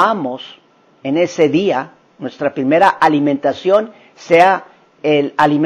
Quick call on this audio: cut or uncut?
uncut